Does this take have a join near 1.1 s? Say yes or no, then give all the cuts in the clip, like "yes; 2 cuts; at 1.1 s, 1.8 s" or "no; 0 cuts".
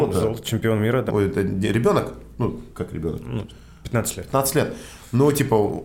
yes; 1 cut; at 1.1 s